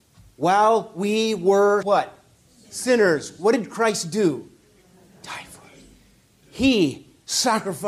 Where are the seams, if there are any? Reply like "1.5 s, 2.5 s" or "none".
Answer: 1.8 s